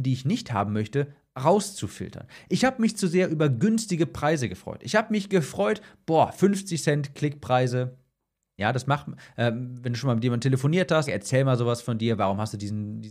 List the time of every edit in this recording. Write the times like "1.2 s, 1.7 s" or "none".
8.6 s, 11.1 s